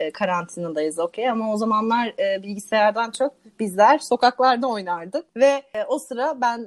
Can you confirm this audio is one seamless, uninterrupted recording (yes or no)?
no